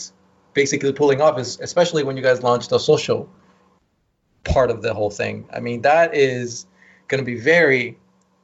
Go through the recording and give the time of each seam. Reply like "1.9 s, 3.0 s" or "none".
none